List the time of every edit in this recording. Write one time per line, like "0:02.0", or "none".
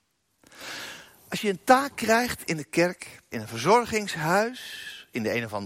0:03.3